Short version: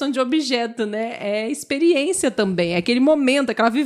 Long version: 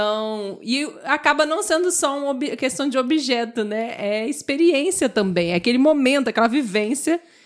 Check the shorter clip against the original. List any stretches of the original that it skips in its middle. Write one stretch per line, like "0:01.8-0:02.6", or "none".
none